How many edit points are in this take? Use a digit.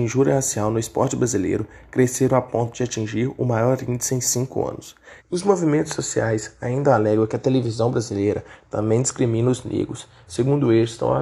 2